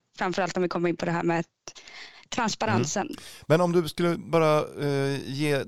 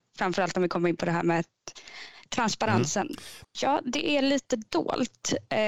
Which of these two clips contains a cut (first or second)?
second